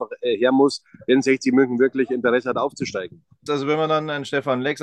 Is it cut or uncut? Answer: cut